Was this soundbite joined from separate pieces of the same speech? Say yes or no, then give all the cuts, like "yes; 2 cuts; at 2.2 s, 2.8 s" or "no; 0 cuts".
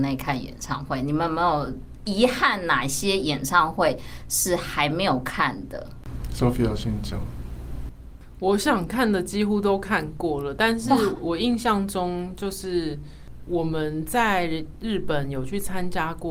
yes; 1 cut; at 11.1 s